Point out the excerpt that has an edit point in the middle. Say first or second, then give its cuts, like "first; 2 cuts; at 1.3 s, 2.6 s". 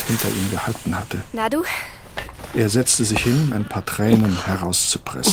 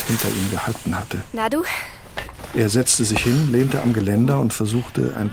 first; 1 cut; at 3.5 s